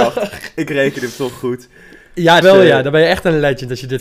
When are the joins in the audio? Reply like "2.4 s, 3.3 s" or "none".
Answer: 2.4 s